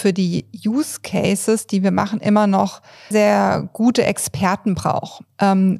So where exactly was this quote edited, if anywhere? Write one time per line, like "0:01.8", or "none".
0:03.1